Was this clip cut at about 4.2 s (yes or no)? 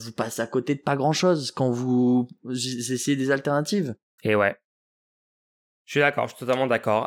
yes